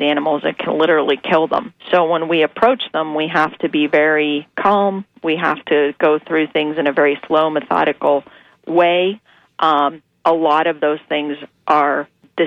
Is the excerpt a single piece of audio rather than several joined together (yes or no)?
yes